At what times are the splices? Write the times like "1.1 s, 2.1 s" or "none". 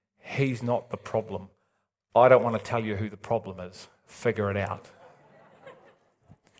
none